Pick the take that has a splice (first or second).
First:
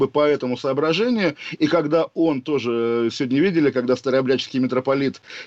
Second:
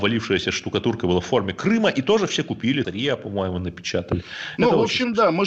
second